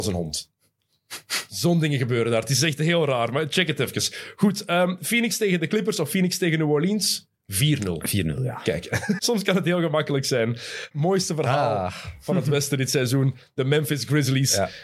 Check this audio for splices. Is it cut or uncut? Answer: cut